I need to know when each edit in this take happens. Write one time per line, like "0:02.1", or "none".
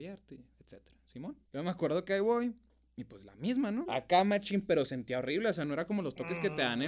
0:01.4
0:03.8